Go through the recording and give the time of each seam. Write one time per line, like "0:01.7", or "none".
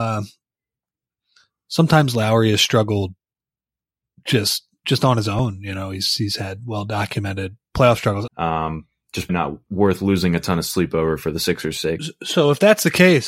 0:08.3
0:09.3